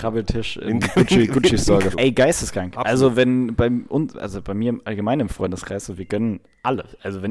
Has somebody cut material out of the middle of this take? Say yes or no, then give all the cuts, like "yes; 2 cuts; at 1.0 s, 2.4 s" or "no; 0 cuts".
yes; 1 cut; at 1.9 s